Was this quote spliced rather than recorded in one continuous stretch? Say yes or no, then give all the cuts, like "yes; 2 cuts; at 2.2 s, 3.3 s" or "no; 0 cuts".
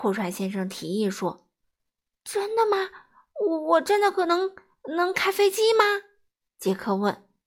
no; 0 cuts